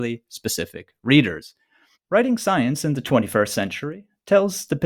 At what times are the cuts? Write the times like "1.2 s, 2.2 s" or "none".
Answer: 2.0 s